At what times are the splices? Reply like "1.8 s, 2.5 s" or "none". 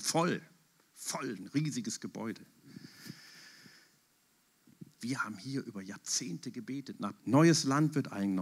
5.0 s, 7.2 s

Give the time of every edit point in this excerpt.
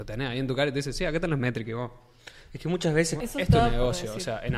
3.2 s

